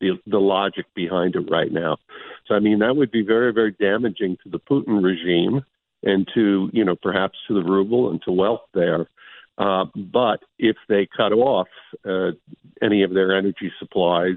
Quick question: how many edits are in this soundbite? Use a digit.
1